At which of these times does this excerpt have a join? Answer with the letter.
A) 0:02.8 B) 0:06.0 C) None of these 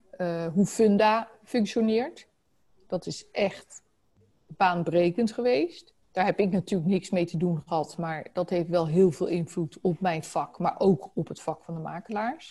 B